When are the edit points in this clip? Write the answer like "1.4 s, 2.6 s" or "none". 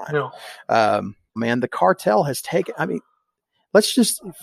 1.4 s